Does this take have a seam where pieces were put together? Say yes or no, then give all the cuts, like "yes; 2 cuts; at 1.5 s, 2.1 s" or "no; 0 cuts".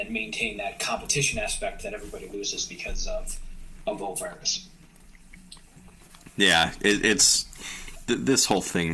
no; 0 cuts